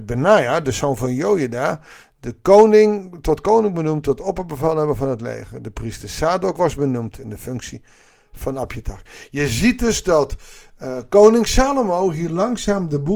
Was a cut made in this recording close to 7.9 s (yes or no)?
no